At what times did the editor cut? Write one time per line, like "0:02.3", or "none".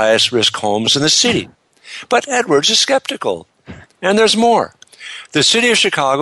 0:03.8